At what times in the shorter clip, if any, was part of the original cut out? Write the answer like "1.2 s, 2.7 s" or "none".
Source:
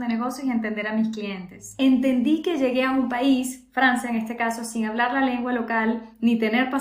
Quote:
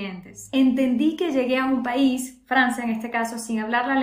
none